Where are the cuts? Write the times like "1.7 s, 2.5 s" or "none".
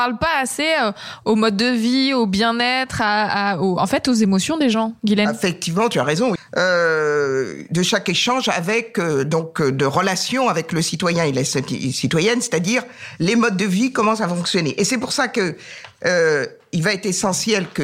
6.4 s